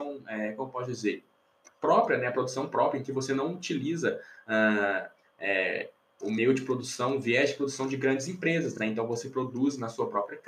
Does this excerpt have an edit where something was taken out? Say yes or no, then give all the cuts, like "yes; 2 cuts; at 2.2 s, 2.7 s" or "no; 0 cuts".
no; 0 cuts